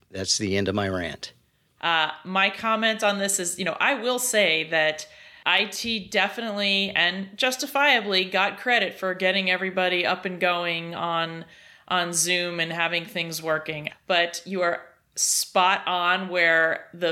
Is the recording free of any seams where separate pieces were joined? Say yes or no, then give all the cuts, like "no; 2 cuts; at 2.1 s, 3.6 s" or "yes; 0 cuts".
no; 2 cuts; at 1.8 s, 13.9 s